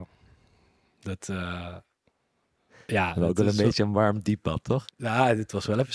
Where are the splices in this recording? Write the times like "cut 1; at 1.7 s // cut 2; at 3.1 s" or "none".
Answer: cut 1; at 4.9 s